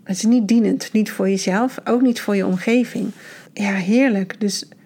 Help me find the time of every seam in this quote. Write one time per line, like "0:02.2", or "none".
0:03.5